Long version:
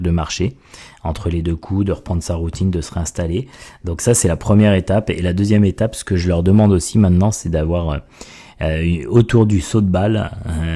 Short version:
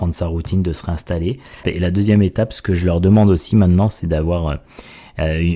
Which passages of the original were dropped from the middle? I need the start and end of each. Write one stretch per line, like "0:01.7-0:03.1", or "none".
0:03.7-0:05.1